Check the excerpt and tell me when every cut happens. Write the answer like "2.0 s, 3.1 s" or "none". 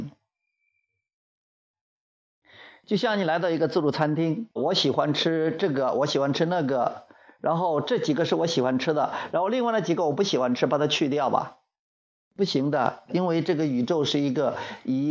4.6 s